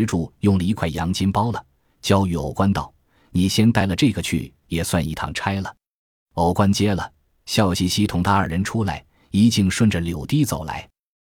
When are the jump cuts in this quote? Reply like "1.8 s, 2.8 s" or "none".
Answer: none